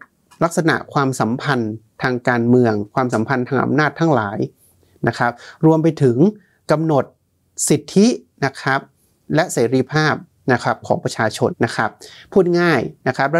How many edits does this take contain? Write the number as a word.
one